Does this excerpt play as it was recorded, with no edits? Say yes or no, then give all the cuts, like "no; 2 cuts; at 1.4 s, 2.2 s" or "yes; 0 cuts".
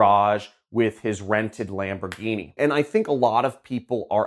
no; 1 cut; at 2.6 s